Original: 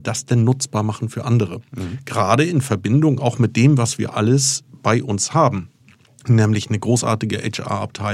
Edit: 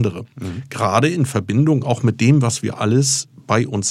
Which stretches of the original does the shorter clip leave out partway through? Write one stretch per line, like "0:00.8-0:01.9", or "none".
none